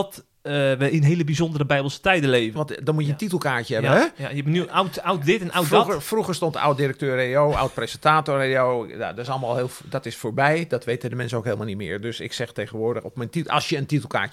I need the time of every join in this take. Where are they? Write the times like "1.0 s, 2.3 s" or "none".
2.6 s